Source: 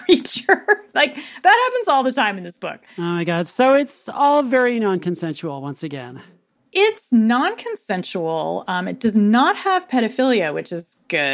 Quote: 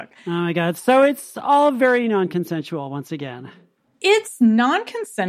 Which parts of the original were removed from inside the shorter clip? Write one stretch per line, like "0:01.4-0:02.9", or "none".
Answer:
none